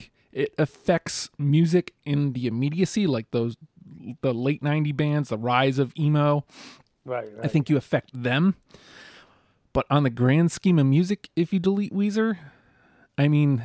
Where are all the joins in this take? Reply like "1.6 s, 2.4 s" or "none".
none